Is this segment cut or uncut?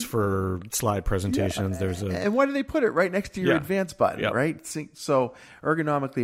uncut